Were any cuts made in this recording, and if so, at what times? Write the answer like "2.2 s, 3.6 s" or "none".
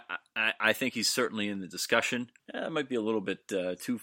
2.4 s